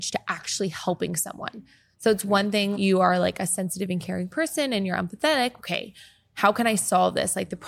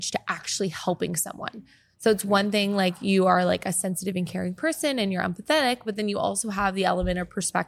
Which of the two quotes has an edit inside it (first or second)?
first